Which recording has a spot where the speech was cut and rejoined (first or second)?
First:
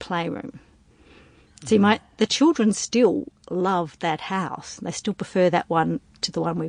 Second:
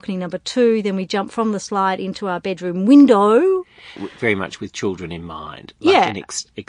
second